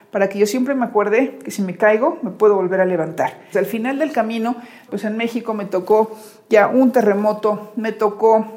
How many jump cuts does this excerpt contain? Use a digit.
2